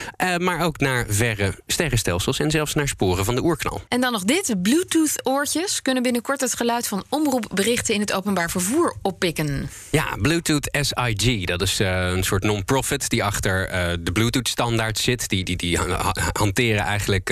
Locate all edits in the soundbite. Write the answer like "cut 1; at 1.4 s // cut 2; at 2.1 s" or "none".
cut 1; at 3.9 s // cut 2; at 15.5 s